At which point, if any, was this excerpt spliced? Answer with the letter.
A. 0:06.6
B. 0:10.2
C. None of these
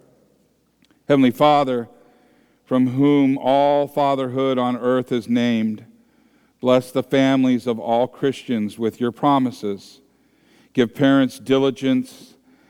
C